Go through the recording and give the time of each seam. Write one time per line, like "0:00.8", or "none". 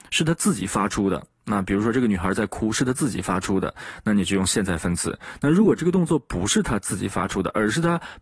none